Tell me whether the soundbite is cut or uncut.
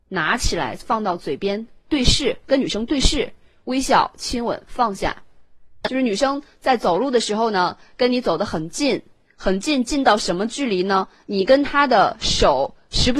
cut